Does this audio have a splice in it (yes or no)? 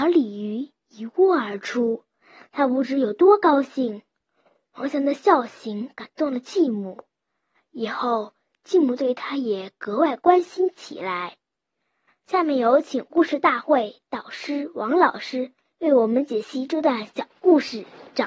no